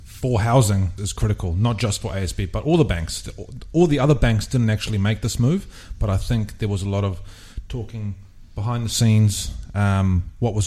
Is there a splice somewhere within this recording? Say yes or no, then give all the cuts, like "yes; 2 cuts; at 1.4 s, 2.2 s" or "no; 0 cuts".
yes; 1 cut; at 1.0 s